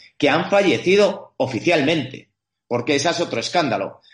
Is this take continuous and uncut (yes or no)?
yes